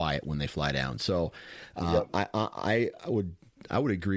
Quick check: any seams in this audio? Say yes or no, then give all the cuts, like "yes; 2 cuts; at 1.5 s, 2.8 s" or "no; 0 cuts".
no; 0 cuts